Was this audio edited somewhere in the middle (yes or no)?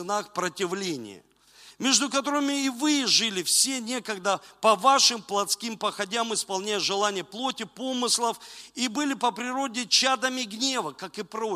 no